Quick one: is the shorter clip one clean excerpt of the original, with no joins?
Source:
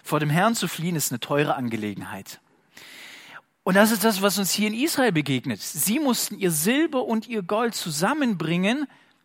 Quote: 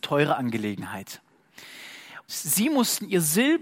no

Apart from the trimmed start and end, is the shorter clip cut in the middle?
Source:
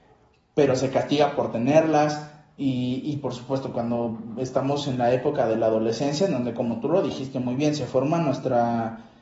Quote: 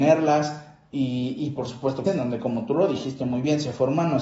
yes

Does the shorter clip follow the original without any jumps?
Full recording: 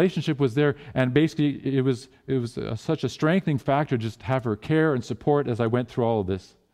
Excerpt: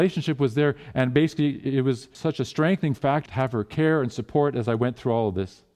no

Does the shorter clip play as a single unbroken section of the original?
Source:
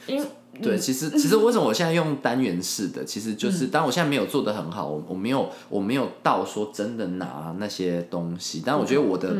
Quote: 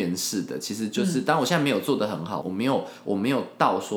no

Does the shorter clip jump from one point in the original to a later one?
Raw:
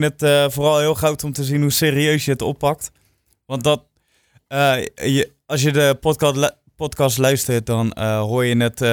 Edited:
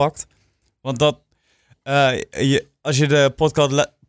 no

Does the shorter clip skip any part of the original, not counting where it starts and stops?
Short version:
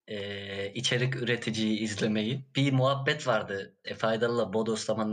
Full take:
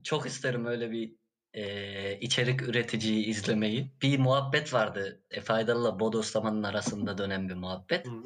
no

